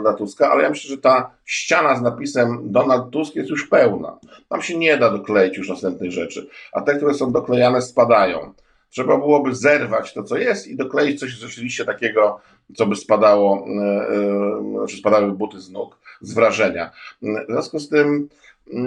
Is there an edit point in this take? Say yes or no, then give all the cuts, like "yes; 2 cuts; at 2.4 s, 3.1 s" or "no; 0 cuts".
no; 0 cuts